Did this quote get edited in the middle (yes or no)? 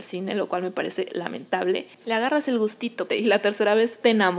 yes